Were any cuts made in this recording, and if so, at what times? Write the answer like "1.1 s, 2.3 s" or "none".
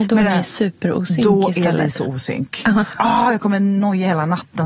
3.0 s